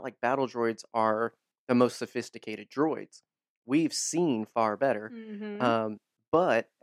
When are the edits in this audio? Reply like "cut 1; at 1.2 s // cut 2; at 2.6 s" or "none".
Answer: none